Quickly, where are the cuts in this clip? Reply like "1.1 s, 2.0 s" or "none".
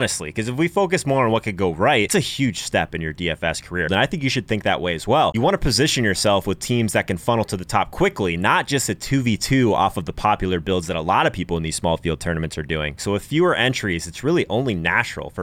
2.1 s, 3.9 s, 13.0 s